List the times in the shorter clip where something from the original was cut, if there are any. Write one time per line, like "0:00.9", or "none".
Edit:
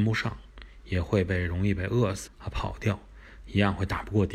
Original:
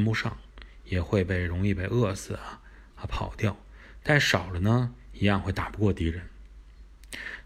0:02.3
0:03.4